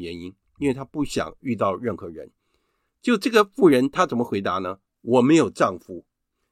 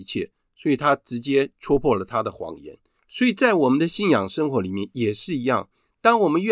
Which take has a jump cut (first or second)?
second